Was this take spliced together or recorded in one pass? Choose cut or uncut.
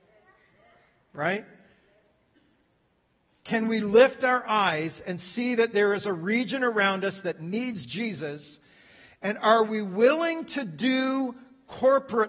uncut